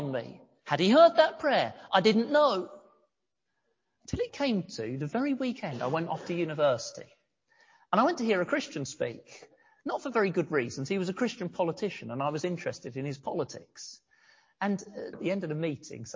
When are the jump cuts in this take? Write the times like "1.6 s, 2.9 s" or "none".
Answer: 15.1 s